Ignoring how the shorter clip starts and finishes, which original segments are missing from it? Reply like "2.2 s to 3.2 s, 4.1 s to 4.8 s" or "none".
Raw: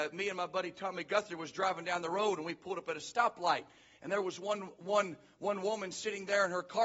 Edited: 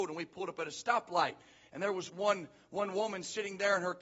4.4 s to 4.8 s

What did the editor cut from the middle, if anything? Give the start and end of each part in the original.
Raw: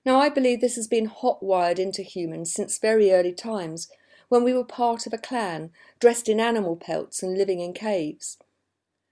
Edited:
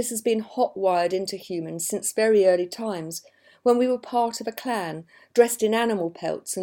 none

